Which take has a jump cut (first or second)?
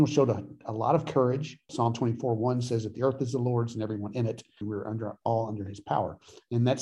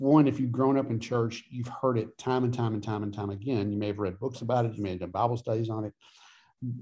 first